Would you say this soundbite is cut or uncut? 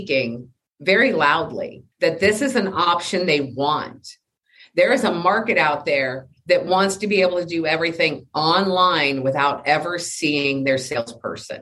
cut